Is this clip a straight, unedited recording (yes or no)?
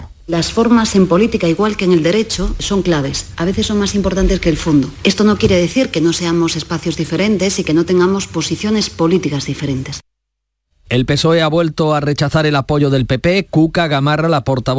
yes